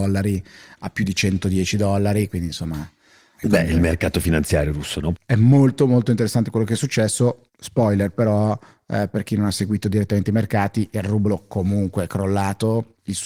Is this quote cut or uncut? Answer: cut